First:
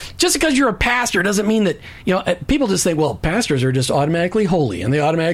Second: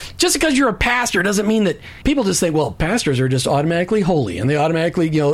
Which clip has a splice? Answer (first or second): second